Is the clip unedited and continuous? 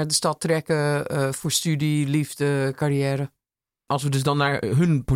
yes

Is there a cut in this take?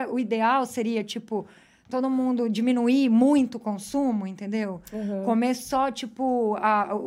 no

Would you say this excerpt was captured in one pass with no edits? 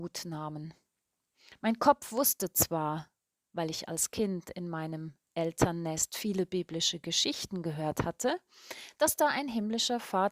yes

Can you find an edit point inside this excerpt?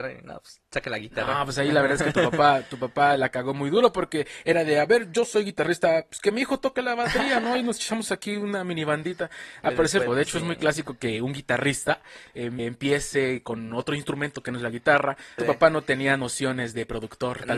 yes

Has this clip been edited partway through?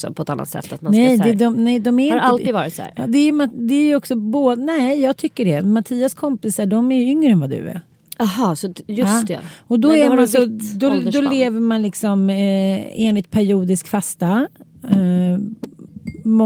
no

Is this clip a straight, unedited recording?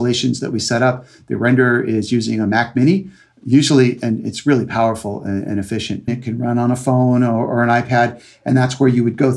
no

